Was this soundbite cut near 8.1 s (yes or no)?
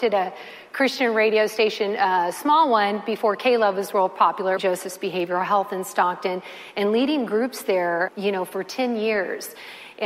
yes